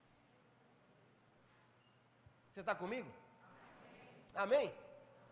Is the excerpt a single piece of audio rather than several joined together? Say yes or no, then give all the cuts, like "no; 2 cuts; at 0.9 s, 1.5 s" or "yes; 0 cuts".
yes; 0 cuts